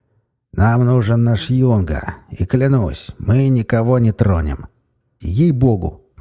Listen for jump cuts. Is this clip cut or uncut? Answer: cut